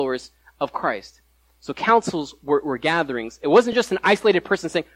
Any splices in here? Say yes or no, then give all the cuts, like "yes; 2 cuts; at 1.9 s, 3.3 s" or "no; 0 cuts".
no; 0 cuts